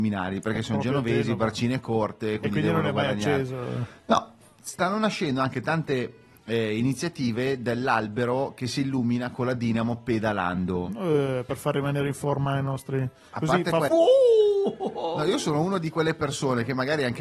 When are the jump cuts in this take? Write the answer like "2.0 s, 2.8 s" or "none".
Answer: 13.9 s